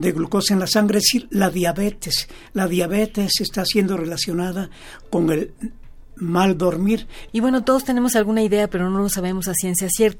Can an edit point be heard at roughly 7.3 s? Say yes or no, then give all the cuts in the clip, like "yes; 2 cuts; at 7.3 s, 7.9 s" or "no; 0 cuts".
yes; 1 cut; at 7.3 s